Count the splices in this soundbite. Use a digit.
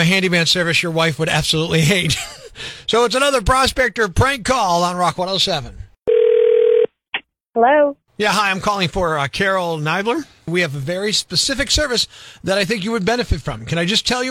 1